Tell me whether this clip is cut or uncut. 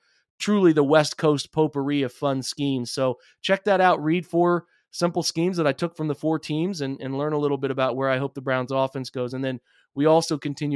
uncut